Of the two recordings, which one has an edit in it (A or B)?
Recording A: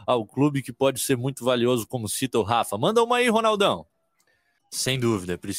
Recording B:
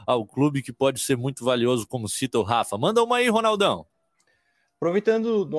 A